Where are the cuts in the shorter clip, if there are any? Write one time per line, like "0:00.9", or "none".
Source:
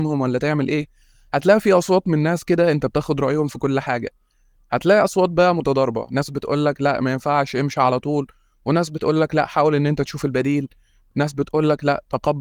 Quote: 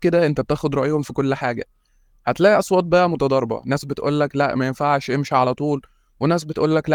none